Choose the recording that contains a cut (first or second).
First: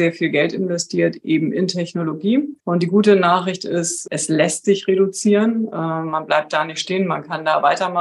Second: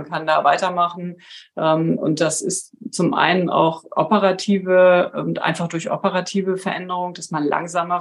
first